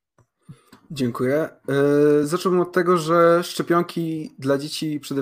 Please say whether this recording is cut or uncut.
uncut